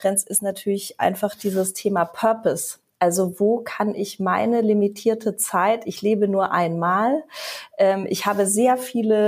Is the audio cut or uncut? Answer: uncut